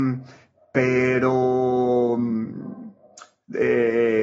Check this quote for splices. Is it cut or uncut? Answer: uncut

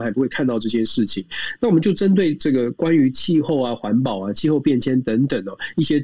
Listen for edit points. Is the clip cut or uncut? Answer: uncut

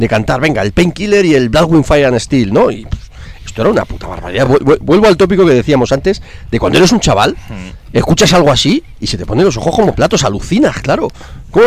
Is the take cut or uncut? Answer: uncut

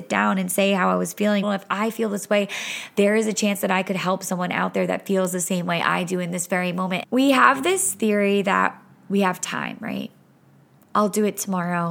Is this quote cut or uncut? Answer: cut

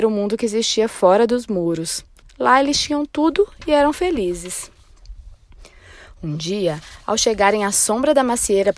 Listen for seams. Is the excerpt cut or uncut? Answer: uncut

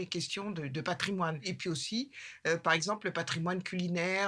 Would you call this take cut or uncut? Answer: uncut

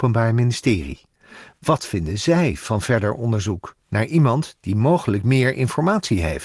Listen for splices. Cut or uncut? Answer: uncut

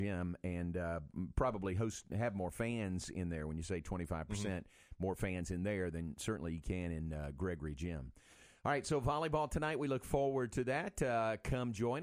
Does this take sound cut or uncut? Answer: uncut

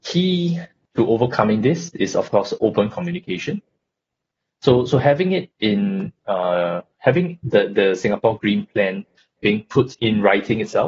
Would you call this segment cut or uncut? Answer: uncut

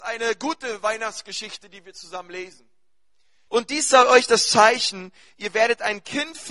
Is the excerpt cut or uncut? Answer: cut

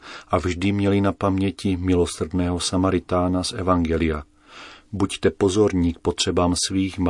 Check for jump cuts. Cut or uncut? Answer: uncut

